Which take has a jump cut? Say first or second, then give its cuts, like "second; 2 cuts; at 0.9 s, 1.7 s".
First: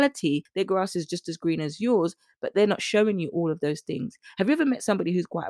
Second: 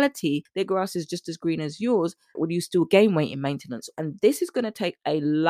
second; 2 cuts; at 2.3 s, 3.9 s